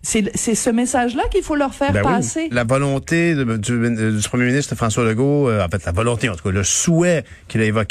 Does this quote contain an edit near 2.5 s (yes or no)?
yes